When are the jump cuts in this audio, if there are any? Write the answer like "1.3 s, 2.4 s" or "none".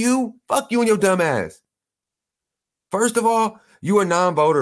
none